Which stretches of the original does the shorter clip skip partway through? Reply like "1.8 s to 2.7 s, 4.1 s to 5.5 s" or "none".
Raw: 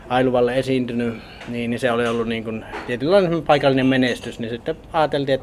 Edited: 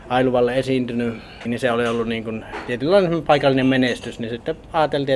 1.5 s to 1.7 s